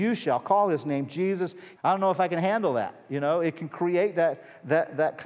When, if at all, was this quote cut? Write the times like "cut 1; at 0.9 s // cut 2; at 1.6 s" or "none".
cut 1; at 1.8 s